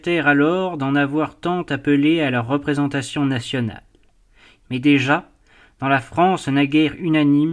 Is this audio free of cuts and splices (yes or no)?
no